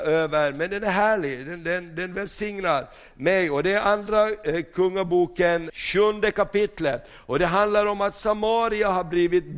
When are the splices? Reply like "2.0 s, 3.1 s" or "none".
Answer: 5.7 s